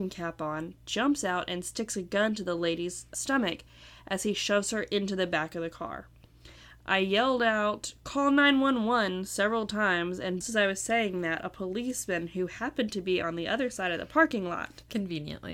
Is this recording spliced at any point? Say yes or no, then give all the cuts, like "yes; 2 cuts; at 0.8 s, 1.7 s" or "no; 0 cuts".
yes; 1 cut; at 10.4 s